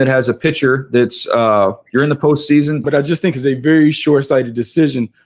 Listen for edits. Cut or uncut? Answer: cut